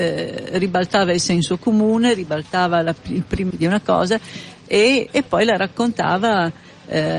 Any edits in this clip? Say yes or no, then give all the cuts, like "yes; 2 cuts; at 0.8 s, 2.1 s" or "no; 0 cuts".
yes; 2 cuts; at 3.5 s, 5.1 s